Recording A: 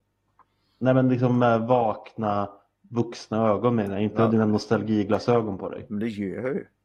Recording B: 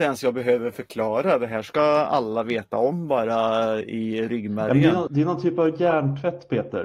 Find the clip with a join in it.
B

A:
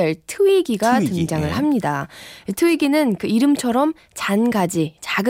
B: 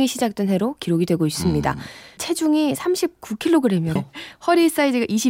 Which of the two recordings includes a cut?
B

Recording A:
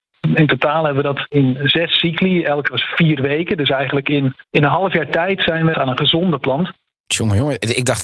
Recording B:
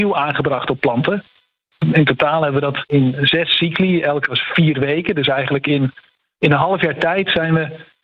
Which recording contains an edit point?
A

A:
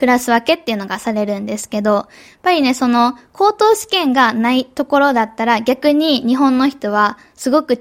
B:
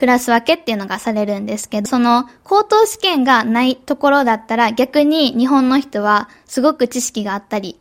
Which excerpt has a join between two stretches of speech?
B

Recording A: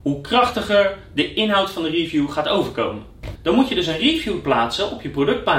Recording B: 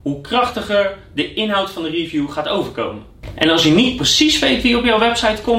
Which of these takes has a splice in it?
A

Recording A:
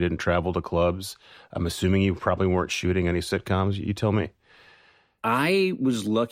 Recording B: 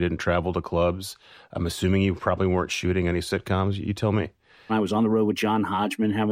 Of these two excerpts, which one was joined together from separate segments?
B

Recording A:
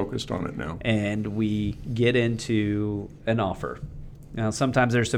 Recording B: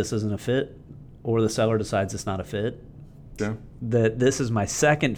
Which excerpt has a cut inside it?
B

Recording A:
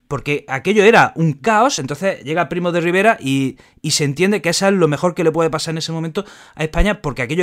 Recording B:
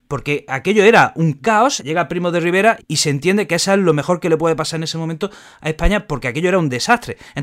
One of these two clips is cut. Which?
B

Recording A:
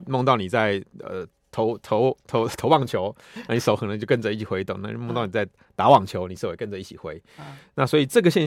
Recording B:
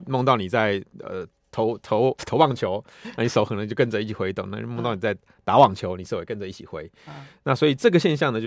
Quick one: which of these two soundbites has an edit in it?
B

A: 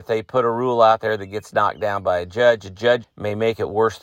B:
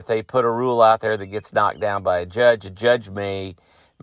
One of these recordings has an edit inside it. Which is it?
A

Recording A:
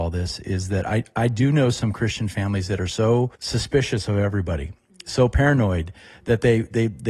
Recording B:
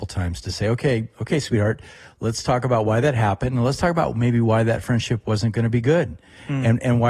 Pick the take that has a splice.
A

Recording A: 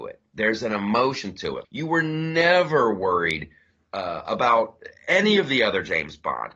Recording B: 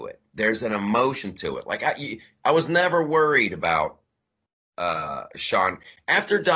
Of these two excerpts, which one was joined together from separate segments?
A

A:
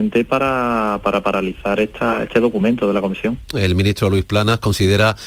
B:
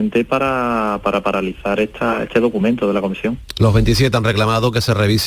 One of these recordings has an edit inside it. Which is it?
A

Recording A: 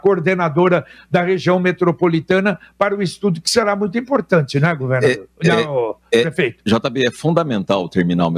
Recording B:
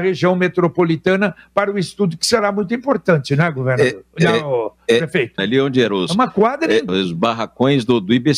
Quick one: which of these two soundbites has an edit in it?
B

